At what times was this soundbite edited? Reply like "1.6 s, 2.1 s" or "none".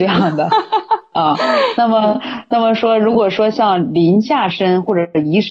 none